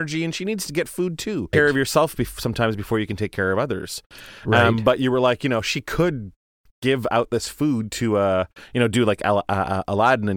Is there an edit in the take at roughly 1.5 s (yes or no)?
yes